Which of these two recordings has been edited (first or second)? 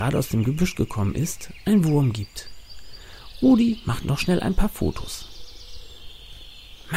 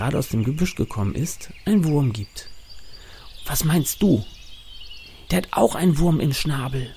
second